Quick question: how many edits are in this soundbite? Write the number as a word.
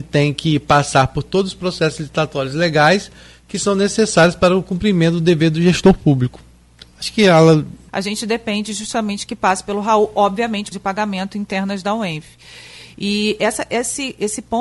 two